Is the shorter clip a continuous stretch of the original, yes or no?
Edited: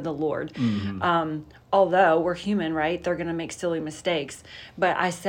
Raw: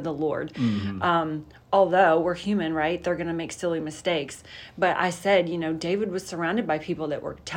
yes